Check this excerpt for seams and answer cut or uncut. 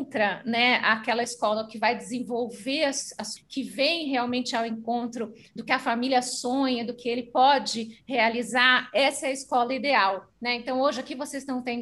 cut